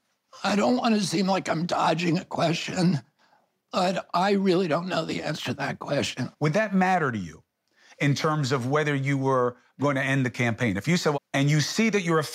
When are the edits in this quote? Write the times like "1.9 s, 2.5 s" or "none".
6.3 s, 11.1 s

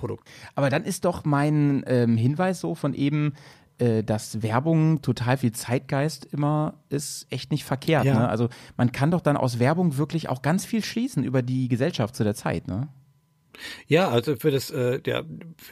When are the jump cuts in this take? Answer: none

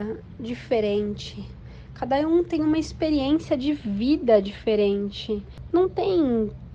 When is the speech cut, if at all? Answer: none

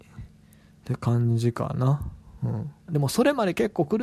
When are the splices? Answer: 2.9 s

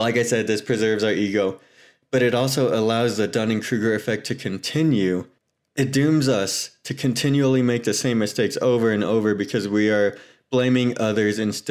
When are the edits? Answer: none

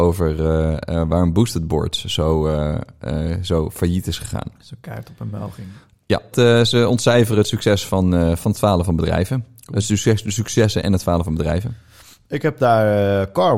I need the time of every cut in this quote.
6.3 s

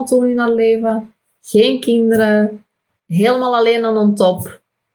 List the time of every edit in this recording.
2.9 s

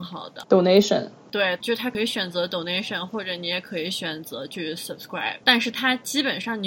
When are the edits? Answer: none

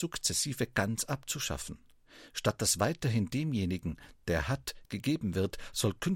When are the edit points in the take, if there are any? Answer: none

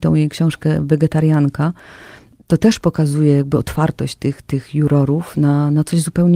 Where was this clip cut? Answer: none

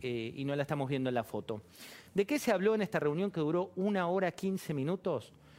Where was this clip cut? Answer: none

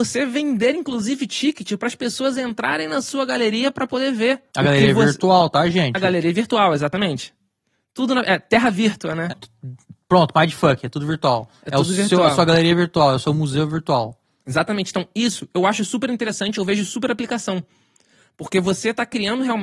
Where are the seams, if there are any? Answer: 4.5 s, 9.3 s

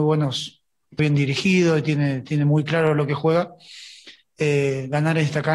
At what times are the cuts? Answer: 1.0 s

